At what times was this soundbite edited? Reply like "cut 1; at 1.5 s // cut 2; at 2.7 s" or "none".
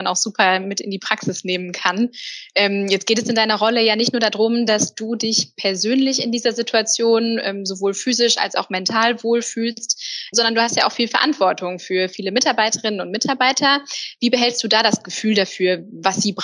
cut 1; at 10.3 s